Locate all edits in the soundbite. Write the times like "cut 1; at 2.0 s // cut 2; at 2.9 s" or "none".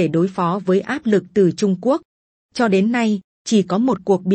cut 1; at 3.4 s